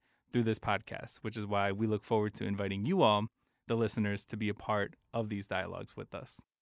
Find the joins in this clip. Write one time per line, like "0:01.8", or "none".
none